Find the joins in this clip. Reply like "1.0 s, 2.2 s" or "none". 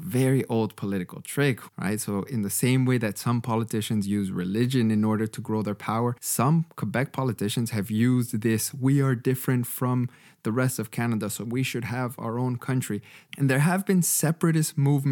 1.7 s, 6.2 s, 13.3 s

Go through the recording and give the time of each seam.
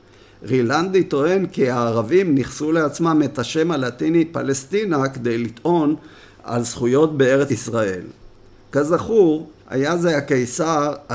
7.5 s, 9.6 s

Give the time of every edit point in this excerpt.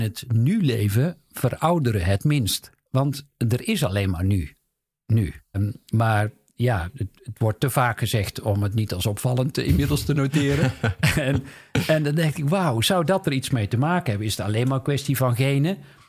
2.9 s, 5.5 s

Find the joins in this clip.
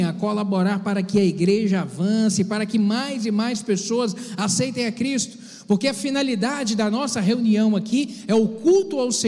none

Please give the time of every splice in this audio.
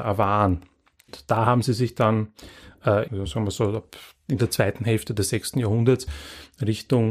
3.1 s

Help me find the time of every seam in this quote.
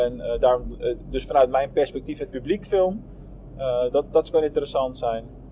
none

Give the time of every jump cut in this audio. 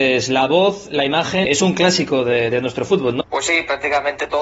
1.4 s, 3.2 s

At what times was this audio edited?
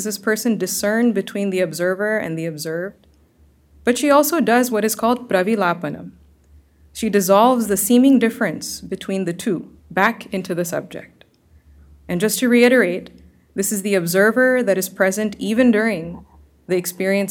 9.8 s

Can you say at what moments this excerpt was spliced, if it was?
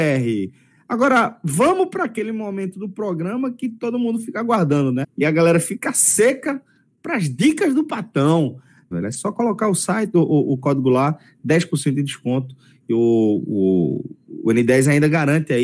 5.0 s, 8.9 s

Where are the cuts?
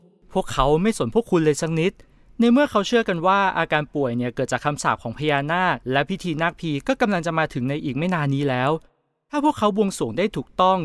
5.8 s

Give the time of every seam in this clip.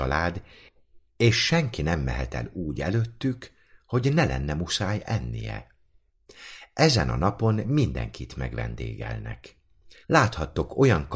10.0 s

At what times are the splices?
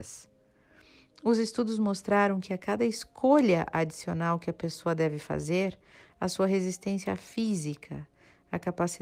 none

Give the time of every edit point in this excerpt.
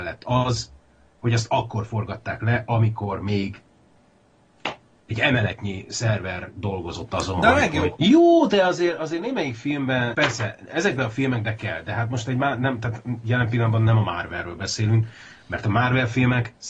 8.0 s, 10.1 s

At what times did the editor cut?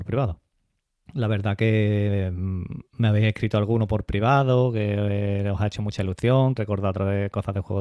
1.1 s, 6.6 s

